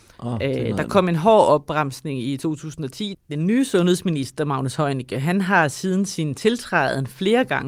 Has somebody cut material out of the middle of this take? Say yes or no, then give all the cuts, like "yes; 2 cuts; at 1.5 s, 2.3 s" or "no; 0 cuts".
yes; 1 cut; at 3.1 s